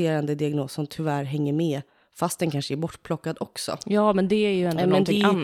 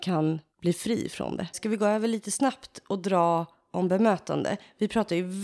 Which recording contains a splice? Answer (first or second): second